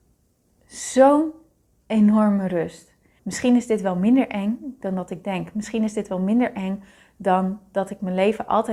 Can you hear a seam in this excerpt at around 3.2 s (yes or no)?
yes